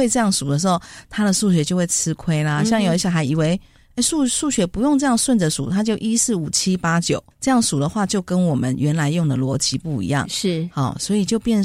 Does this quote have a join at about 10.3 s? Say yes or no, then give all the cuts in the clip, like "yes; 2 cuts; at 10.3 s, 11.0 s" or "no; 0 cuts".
no; 1 cut; at 7.3 s